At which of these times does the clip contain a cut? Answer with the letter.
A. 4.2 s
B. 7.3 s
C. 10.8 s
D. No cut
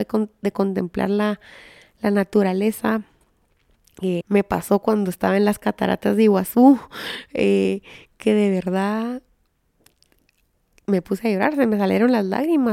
A